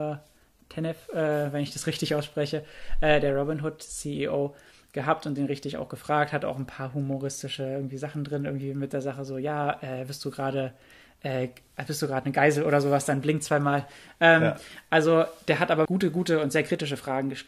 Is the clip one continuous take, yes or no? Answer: no